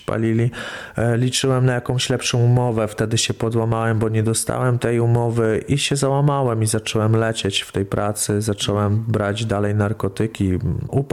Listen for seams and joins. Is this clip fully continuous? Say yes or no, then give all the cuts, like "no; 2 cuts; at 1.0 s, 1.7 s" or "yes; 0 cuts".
yes; 0 cuts